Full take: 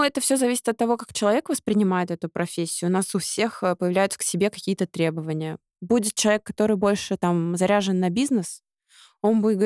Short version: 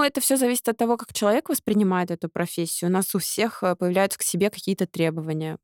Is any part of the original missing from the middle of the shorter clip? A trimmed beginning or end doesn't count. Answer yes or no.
no